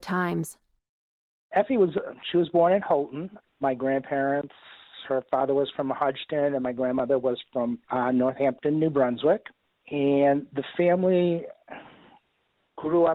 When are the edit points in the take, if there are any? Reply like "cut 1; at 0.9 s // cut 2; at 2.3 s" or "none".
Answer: none

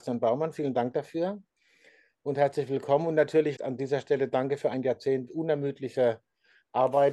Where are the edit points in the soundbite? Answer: cut 1; at 3.6 s // cut 2; at 5.3 s

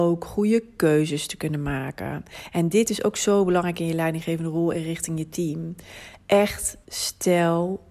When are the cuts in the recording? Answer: cut 1; at 6.8 s

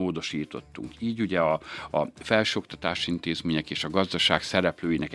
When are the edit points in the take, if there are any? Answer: none

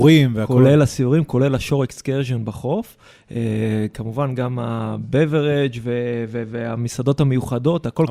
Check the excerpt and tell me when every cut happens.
none

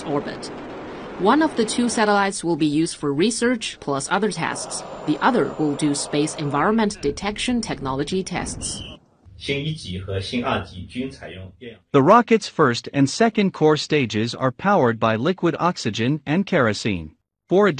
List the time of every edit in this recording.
cut 1; at 3.8 s

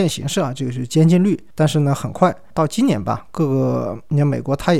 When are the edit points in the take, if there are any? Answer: cut 1; at 1.5 s

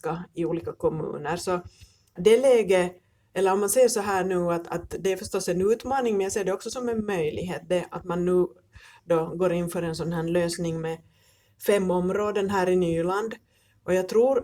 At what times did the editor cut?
cut 1; at 2.2 s

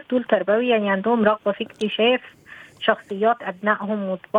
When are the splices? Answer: none

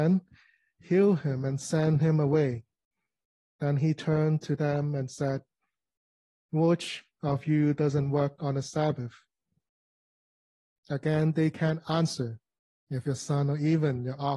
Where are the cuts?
cut 1; at 10.8 s // cut 2; at 12.7 s

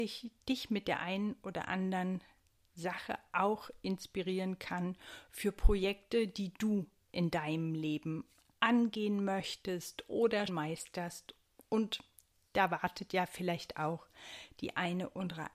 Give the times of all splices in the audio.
cut 1; at 10.5 s

